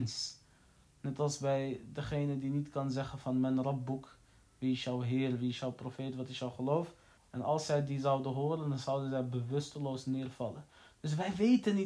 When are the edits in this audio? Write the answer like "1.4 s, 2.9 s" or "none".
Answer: 7.2 s